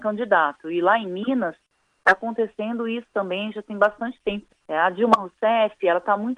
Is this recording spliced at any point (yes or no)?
yes